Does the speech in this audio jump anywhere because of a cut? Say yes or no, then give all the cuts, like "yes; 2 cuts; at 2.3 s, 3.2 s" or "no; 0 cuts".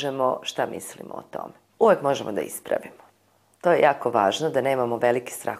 yes; 1 cut; at 1.7 s